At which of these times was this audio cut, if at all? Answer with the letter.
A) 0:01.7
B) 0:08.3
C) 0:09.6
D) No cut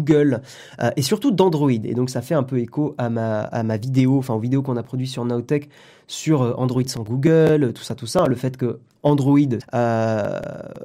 C